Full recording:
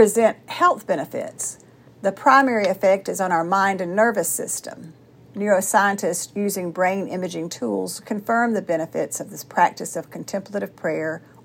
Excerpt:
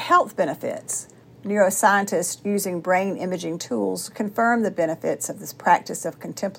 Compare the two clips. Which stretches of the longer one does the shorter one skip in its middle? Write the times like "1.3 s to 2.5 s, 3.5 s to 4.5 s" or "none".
1.7 s to 5.1 s